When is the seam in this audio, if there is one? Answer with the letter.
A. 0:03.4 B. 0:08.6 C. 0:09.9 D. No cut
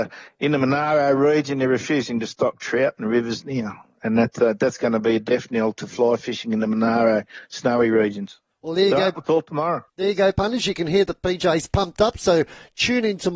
D